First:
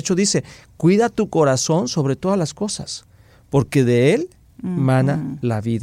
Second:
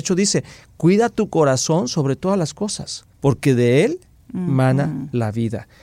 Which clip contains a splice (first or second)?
second